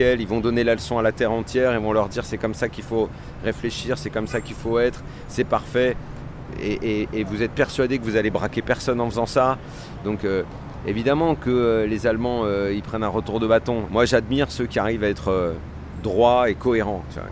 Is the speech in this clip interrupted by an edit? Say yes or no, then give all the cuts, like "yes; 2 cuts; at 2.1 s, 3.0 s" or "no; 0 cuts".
yes; 1 cut; at 13.9 s